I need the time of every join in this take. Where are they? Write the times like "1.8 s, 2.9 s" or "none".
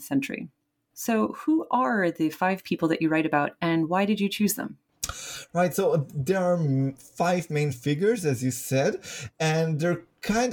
0.9 s